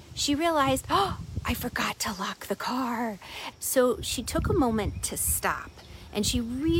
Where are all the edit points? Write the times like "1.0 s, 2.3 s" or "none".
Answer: 3.5 s